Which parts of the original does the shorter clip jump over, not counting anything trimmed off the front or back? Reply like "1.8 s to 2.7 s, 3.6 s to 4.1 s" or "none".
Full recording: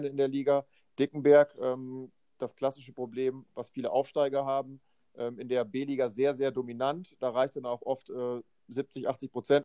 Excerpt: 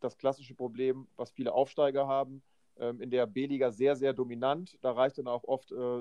none